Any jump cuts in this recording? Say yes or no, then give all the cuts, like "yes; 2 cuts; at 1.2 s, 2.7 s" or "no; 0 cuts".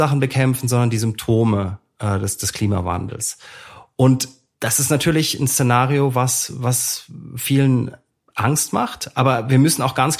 no; 0 cuts